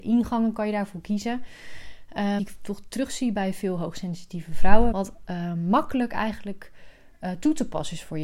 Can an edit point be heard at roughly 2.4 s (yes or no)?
yes